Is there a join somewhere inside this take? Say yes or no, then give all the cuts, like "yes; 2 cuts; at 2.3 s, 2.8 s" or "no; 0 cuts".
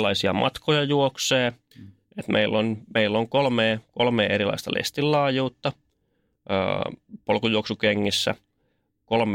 yes; 1 cut; at 1.7 s